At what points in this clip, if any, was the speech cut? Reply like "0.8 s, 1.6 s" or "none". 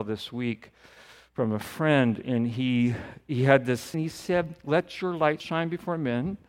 3.9 s, 5.4 s